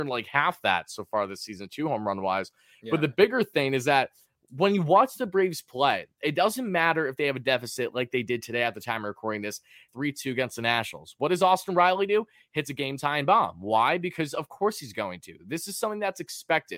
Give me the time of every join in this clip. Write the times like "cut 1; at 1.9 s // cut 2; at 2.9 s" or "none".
cut 1; at 9.9 s